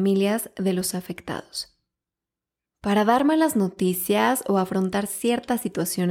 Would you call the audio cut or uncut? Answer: cut